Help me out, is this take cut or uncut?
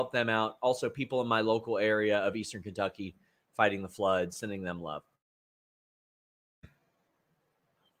uncut